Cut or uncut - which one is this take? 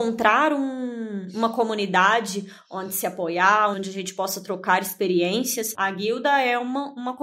cut